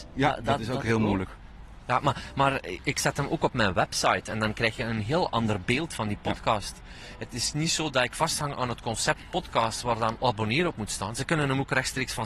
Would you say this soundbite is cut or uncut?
cut